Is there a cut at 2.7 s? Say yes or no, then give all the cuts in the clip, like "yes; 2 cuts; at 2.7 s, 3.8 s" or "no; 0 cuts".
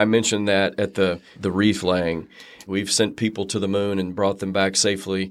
yes; 2 cuts; at 1.3 s, 2.7 s